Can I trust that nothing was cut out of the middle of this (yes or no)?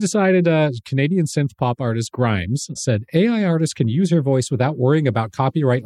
no